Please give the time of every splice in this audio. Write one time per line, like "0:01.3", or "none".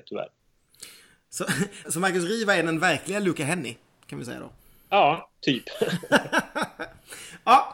0:01.8